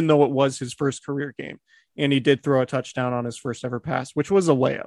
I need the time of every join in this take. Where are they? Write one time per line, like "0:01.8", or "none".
none